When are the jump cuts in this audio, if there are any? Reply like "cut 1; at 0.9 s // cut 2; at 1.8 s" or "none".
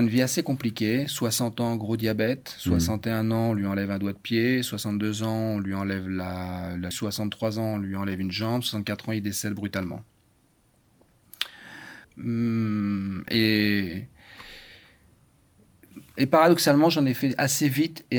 cut 1; at 6.9 s // cut 2; at 12.0 s